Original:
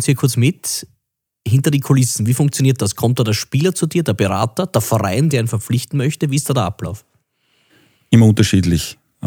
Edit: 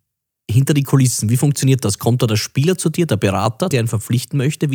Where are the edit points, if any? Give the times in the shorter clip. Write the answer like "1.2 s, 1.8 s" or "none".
3.7 s